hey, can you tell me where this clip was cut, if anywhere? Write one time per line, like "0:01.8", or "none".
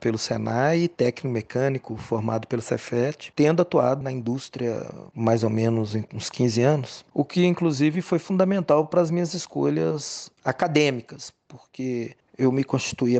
0:04.0